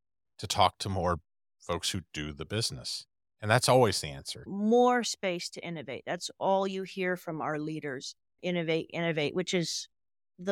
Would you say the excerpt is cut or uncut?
cut